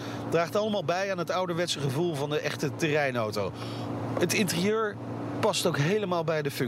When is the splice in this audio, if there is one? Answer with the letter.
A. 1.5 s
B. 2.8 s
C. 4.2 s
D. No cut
C